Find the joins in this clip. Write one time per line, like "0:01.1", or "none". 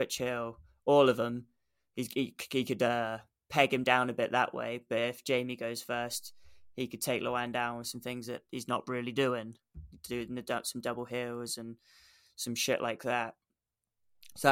none